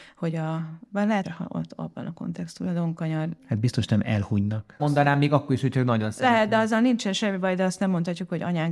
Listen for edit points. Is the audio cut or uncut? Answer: cut